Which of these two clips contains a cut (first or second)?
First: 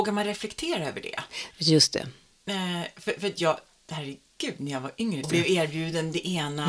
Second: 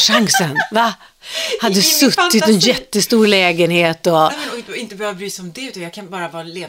first